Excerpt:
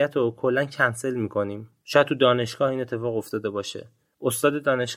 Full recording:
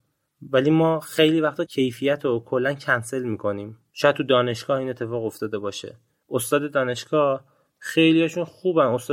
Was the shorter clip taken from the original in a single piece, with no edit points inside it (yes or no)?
yes